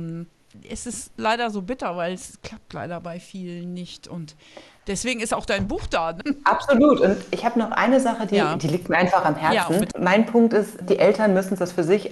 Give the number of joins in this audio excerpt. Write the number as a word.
zero